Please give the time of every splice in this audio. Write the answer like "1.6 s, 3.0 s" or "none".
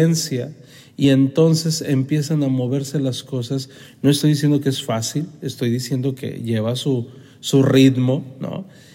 none

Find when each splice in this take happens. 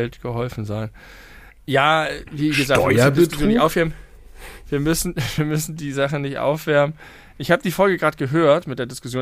none

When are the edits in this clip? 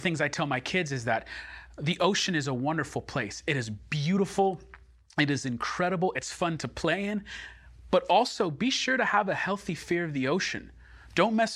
none

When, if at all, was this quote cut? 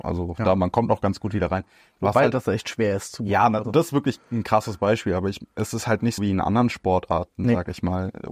6.2 s

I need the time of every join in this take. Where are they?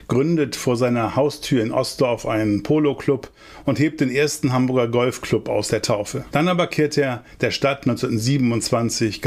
6.3 s

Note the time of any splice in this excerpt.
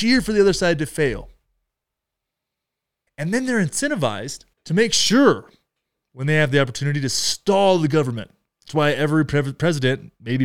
3.1 s, 4.5 s

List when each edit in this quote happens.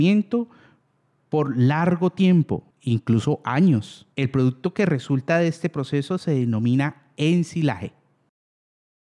2.7 s, 4.1 s

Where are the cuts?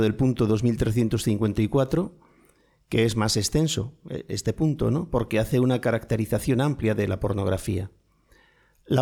none

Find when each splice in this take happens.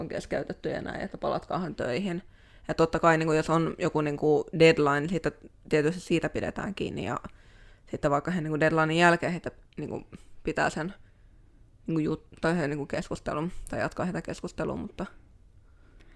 none

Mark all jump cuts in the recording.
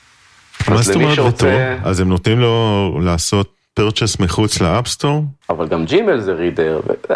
5.4 s

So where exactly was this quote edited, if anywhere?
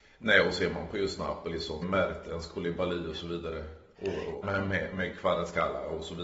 1.8 s, 4.4 s

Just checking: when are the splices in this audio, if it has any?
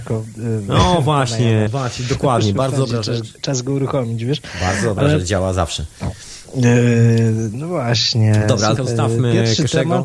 1.7 s, 8.8 s

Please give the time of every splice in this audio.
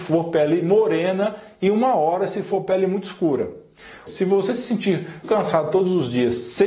4.1 s, 5.2 s

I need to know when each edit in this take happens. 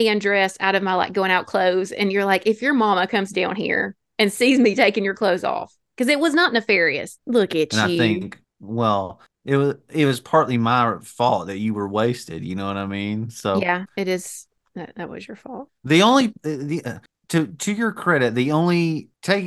7.2 s

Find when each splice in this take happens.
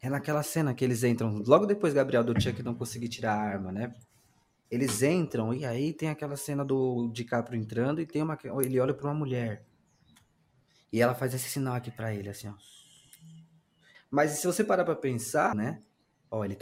13.9 s, 15.5 s

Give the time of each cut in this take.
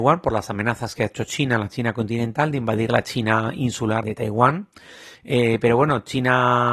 4.0 s

